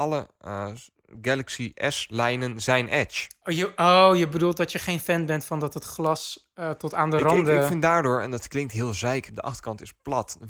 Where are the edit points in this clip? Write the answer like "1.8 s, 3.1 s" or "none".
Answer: 9.3 s